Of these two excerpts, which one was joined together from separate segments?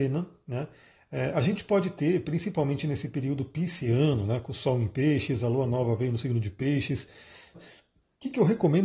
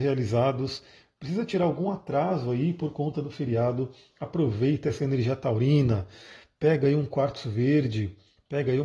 first; 1 cut; at 7.5 s

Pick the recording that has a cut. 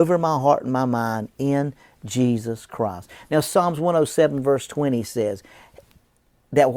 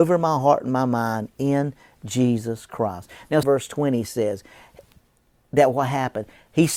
second; 1 cut; at 3.4 s

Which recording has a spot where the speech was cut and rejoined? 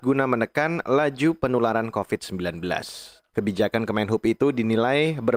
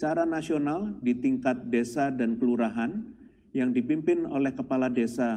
first; 1 cut; at 3.3 s

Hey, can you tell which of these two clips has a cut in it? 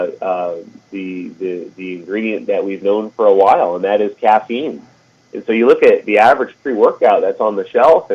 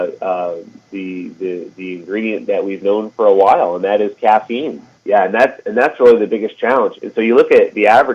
second; 2 cuts; at 5.0 s, 6.9 s

